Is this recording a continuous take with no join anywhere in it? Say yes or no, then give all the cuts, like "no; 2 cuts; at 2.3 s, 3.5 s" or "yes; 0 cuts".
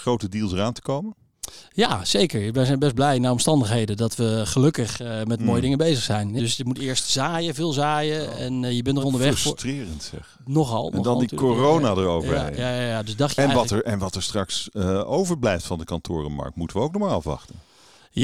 no; 2 cuts; at 6.4 s, 9.0 s